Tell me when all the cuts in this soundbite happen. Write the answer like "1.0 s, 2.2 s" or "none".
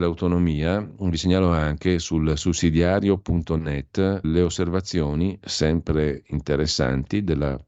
4.2 s